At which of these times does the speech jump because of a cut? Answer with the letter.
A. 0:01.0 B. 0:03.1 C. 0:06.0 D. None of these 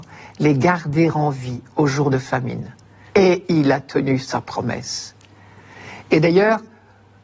B